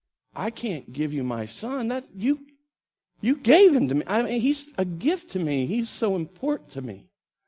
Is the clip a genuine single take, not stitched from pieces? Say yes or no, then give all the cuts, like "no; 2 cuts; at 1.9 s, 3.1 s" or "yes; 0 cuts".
yes; 0 cuts